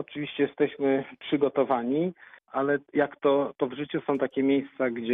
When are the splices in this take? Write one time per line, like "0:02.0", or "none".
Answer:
0:02.4